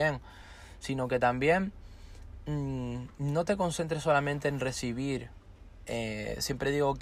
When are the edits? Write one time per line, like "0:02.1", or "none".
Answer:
none